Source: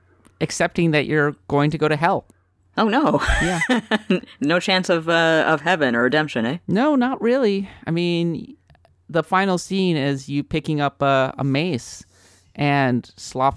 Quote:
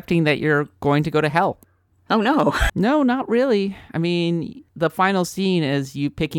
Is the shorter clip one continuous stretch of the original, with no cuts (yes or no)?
no